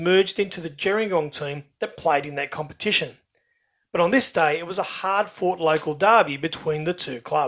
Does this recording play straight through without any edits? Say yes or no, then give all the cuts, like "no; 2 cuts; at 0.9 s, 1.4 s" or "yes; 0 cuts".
yes; 0 cuts